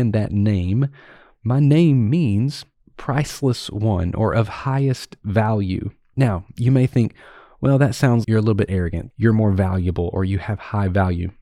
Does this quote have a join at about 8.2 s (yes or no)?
yes